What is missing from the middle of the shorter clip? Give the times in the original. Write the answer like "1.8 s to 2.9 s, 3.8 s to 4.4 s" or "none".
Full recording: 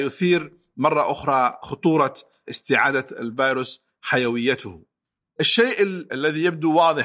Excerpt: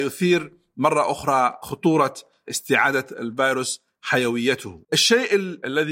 4.8 s to 5.3 s